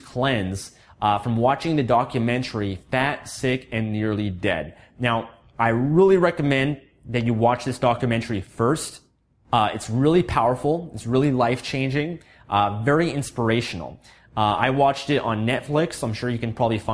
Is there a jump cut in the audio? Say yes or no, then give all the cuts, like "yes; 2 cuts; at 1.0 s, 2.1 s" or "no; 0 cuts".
no; 0 cuts